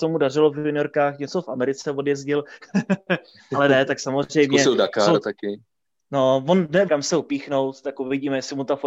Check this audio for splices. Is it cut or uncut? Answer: cut